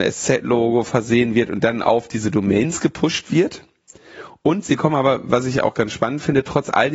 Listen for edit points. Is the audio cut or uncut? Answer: uncut